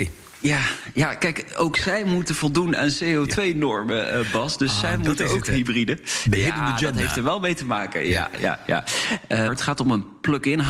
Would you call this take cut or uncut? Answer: cut